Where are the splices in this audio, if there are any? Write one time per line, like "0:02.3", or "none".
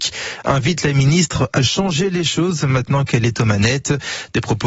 0:01.6

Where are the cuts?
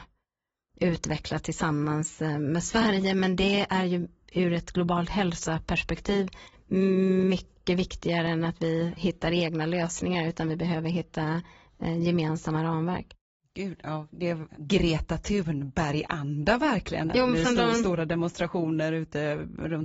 0:14.5
0:17.1

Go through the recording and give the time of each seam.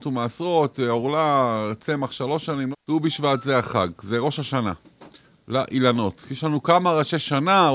0:02.7

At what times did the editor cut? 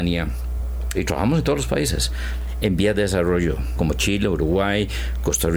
0:00.9
0:03.8

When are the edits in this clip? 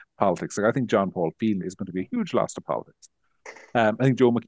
0:01.6

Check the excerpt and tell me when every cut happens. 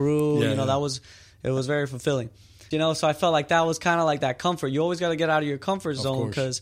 0:02.7

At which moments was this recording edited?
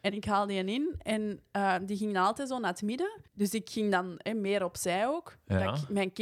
0:03.3

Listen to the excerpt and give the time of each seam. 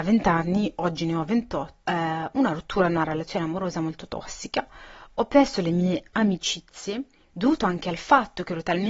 0:01.9

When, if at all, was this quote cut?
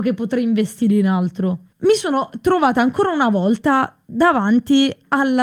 0:01.7

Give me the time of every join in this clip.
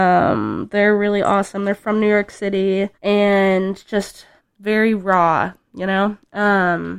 0:02.9
0:04.4

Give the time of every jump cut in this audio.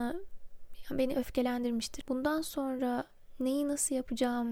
0:02.0

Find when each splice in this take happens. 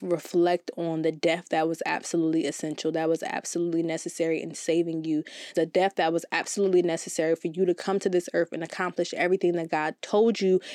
0:05.5

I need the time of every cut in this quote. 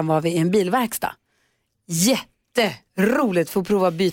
none

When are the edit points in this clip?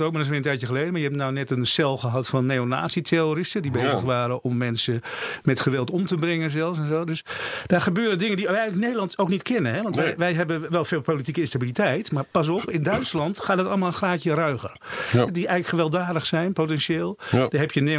0:15.3

